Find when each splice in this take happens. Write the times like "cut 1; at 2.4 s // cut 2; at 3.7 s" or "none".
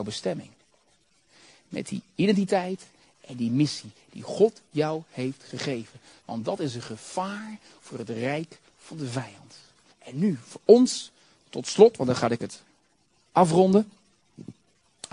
cut 1; at 9.9 s